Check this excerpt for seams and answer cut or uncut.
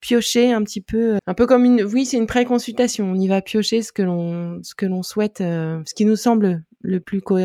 cut